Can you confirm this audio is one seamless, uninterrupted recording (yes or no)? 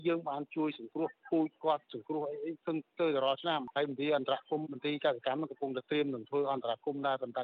no